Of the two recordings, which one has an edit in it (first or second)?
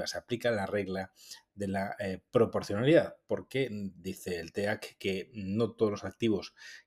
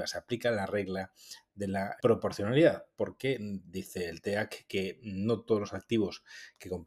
second